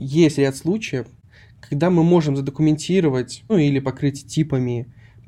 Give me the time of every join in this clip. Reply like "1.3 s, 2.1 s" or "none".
3.5 s